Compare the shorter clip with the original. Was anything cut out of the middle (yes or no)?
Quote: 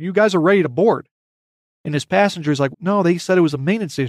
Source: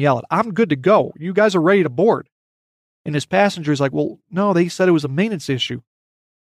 yes